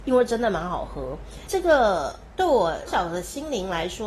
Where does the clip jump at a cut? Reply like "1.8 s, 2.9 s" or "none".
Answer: 1.5 s, 2.9 s